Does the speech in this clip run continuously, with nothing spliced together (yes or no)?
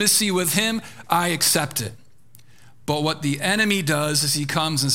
yes